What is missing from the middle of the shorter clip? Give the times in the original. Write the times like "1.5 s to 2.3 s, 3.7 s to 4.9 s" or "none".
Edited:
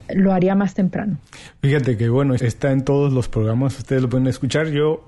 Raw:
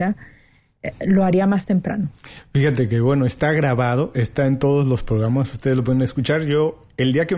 3.3 s to 4.1 s